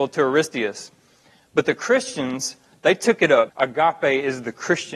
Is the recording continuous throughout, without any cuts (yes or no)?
no